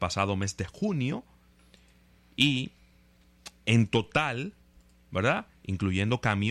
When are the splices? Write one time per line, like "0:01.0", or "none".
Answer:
0:03.6